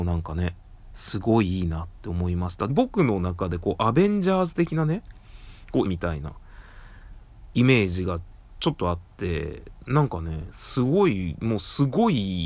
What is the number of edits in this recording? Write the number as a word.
two